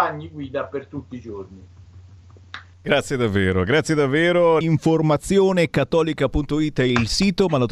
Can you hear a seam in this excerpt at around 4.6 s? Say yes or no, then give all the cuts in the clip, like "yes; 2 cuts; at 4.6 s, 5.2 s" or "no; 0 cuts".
yes; 2 cuts; at 2.7 s, 4.6 s